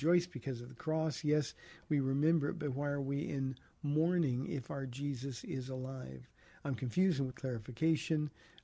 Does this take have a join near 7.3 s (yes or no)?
yes